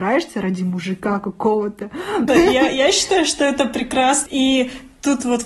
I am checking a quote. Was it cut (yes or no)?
yes